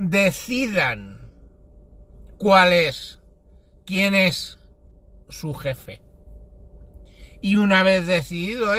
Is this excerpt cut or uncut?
uncut